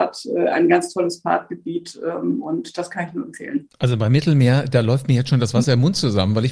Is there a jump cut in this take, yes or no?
no